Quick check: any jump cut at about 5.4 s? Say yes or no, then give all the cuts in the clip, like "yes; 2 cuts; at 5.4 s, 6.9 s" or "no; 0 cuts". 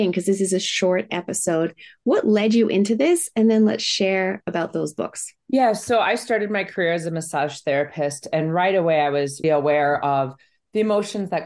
yes; 2 cuts; at 5.4 s, 9.4 s